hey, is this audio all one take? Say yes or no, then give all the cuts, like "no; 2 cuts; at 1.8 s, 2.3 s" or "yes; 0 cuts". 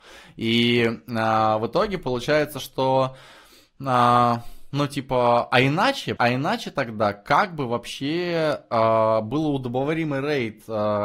no; 1 cut; at 6.2 s